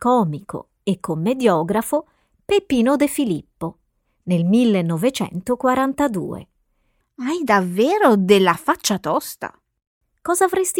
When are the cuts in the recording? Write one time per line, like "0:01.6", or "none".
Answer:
0:07.0